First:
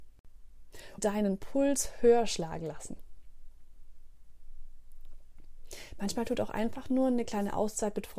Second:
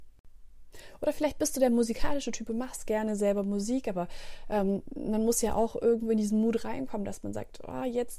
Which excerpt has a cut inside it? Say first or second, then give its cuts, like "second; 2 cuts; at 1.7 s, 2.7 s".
first; 1 cut; at 1.0 s